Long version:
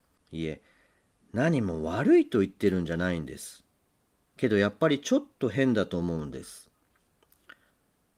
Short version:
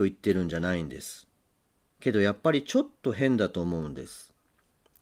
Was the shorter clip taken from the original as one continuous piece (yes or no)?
yes